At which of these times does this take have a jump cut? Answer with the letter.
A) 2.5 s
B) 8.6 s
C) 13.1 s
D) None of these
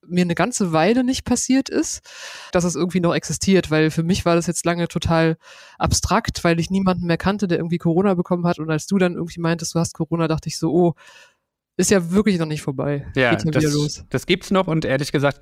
A